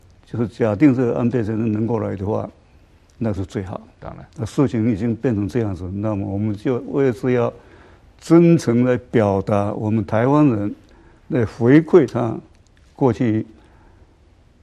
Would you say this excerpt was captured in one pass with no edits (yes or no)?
yes